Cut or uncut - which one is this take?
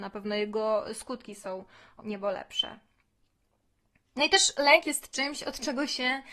cut